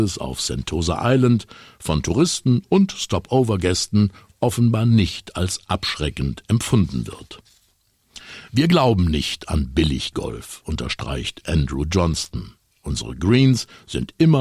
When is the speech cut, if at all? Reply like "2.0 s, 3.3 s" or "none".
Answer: 12.7 s